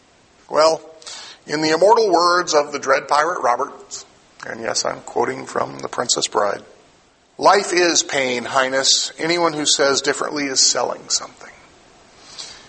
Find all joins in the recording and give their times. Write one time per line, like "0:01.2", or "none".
none